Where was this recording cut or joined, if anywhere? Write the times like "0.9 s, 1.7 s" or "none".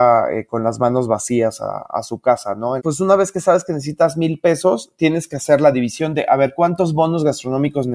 2.8 s